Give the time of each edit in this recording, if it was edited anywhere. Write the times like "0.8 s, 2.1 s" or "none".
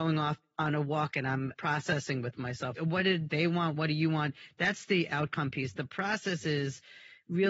2.8 s